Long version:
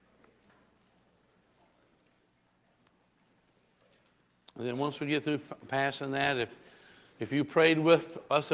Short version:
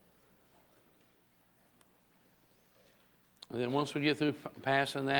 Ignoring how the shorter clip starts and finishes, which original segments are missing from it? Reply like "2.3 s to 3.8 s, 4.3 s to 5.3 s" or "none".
none

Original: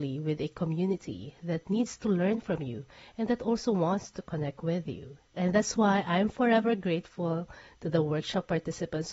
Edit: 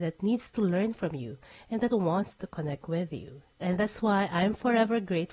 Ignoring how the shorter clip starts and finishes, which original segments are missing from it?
3.4 s to 3.7 s

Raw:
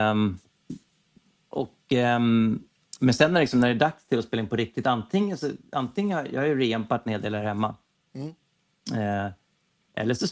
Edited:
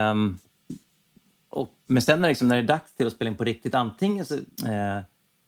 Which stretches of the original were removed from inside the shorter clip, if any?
1.9 s to 3.0 s, 5.7 s to 8.8 s

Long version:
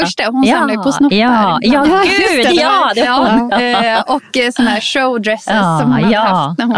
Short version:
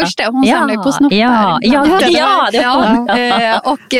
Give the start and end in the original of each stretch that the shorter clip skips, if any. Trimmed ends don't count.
2.0 s to 2.4 s

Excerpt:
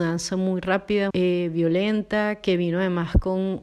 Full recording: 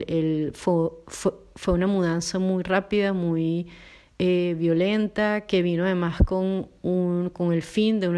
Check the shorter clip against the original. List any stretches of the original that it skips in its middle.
3.1 s to 4.2 s

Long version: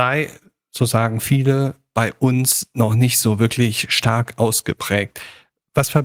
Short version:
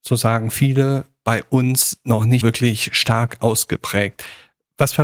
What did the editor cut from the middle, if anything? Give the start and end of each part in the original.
3.1 s to 3.4 s

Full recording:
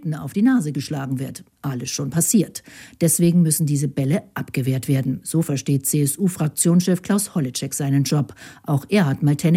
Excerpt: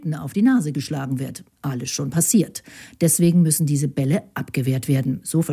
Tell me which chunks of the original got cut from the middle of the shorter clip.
none

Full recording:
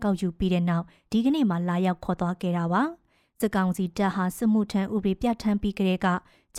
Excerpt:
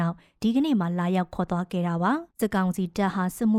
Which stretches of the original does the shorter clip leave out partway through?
3.0 s to 3.3 s

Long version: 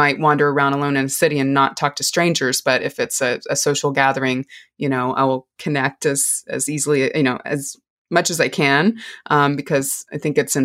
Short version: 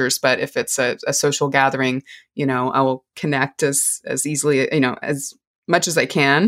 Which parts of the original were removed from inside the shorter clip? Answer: none

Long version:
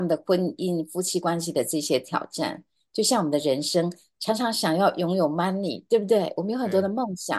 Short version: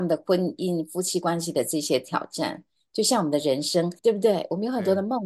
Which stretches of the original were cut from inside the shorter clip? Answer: 4.0 s to 5.9 s

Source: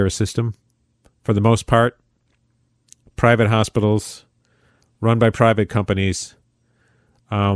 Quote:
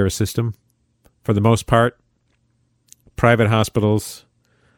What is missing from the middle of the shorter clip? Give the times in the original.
none

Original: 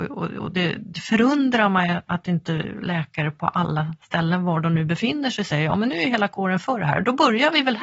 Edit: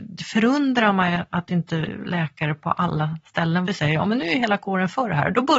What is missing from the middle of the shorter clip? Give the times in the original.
4.4 s to 5.4 s

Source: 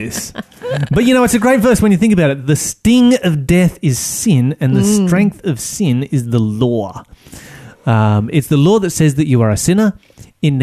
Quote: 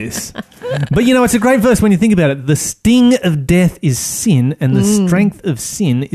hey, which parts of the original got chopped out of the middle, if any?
none

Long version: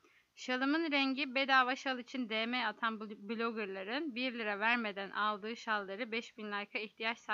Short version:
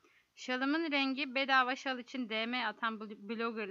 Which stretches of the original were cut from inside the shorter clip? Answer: none

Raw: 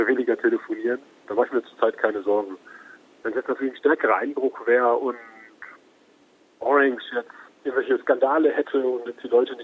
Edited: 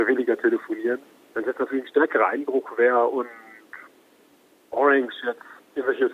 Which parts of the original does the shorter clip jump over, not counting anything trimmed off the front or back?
1.1 s to 3.0 s

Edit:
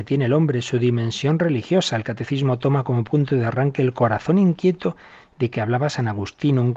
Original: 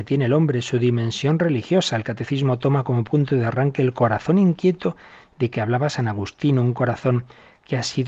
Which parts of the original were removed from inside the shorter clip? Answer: none

